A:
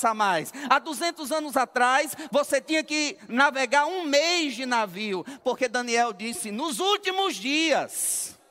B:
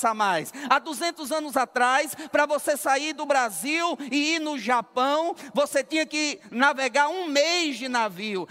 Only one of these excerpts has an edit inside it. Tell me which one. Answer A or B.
A